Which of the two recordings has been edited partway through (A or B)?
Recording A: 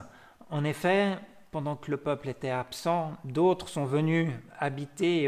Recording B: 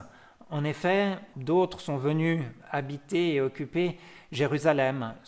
B